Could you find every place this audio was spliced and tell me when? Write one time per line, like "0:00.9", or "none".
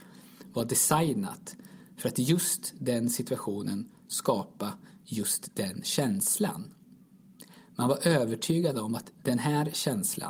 none